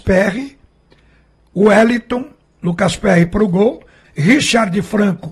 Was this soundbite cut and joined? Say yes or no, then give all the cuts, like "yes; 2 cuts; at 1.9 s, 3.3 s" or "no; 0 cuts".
yes; 1 cut; at 4.0 s